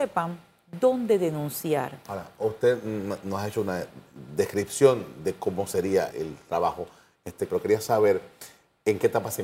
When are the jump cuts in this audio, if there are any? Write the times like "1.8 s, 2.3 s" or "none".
6.1 s, 7.5 s